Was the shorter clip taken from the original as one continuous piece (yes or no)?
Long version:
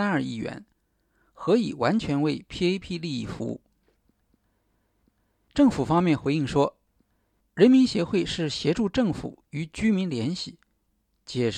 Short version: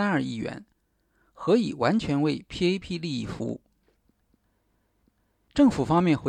yes